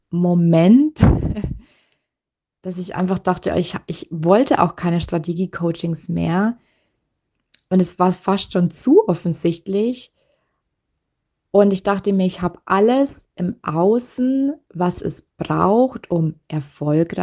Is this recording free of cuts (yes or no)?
yes